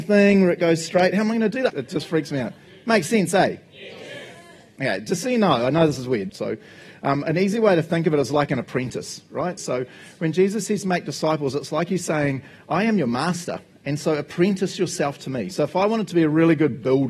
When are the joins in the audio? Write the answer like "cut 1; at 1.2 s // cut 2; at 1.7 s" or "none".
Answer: cut 1; at 1.7 s // cut 2; at 6.3 s // cut 3; at 9.6 s